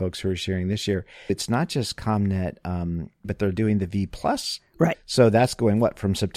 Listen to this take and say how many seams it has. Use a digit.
3